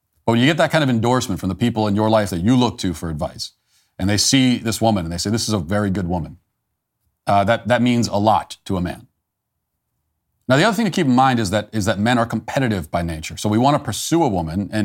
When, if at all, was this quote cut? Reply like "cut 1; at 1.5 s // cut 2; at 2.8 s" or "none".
none